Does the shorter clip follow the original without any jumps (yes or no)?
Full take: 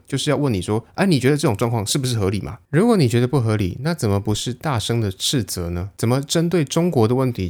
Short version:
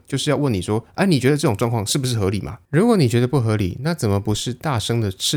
yes